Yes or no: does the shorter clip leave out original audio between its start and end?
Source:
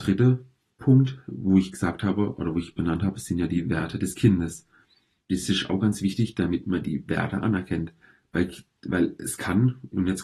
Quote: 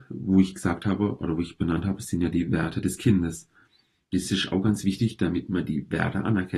no